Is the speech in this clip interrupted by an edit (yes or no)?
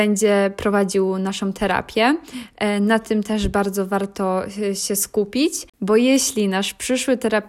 no